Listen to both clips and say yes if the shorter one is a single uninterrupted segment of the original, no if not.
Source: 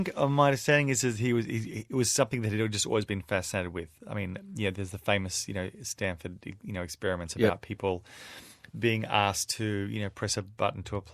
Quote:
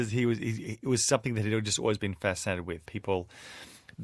no